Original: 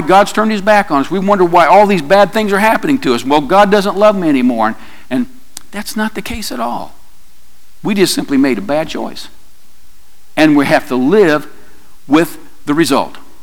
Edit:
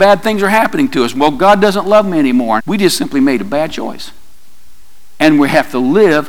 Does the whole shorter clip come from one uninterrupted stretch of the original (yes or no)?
no